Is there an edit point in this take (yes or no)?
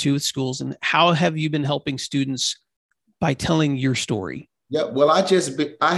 yes